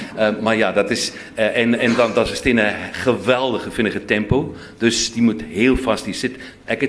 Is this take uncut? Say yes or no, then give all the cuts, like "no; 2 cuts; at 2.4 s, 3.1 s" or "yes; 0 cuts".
yes; 0 cuts